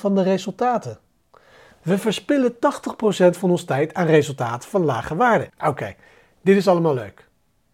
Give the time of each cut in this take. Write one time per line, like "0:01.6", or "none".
0:01.8
0:05.5